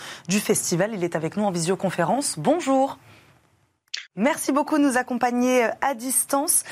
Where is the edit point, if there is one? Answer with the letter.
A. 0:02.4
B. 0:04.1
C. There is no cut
B